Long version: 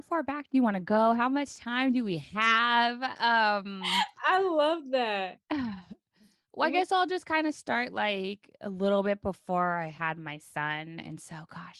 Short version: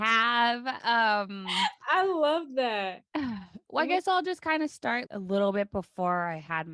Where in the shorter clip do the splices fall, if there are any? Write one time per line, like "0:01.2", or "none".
0:03.6
0:05.1